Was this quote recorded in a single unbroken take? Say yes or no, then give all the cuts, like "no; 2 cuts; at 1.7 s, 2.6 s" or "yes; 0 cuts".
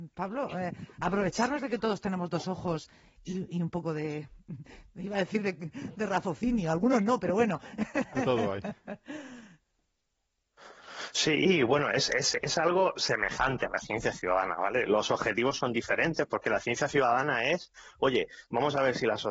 yes; 0 cuts